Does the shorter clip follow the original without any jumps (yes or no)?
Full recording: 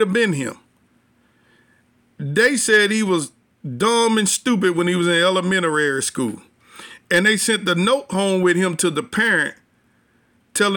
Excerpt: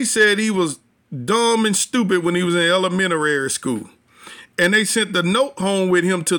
yes